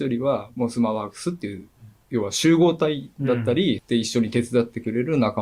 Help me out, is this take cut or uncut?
cut